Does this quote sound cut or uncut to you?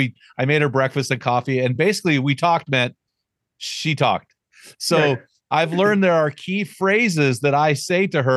uncut